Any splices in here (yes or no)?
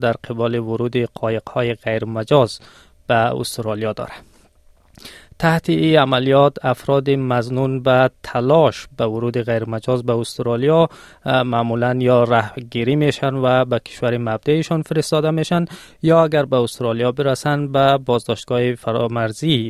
no